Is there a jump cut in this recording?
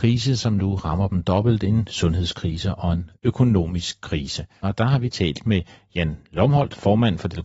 yes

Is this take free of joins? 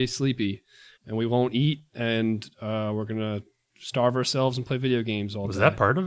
no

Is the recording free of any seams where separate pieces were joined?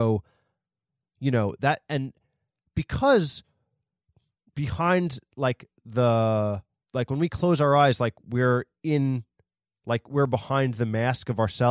no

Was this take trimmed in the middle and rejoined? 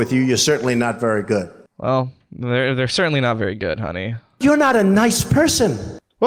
no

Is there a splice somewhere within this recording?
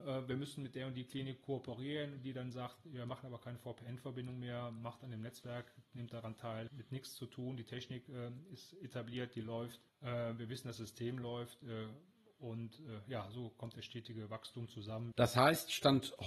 yes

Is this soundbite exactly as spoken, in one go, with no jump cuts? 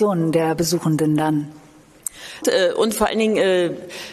no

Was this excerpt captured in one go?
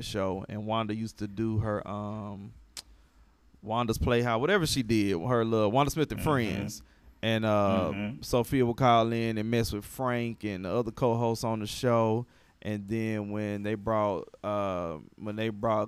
yes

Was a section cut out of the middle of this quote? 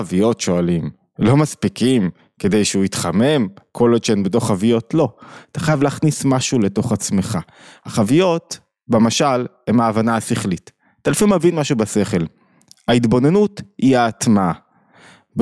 no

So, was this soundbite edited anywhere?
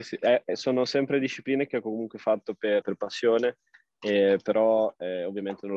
yes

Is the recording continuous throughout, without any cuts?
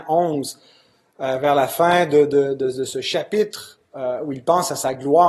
yes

